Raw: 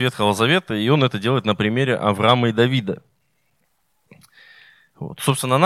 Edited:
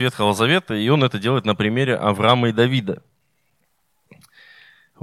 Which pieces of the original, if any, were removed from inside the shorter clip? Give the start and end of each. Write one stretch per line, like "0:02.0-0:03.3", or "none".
none